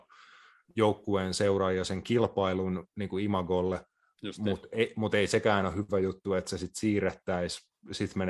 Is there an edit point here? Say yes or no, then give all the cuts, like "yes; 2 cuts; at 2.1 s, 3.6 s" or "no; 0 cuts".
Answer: no; 0 cuts